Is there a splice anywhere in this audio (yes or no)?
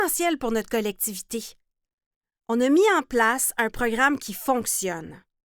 no